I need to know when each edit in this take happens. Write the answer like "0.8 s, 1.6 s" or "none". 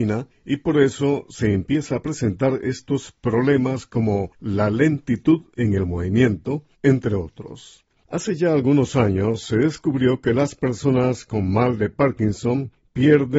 6.7 s, 7.9 s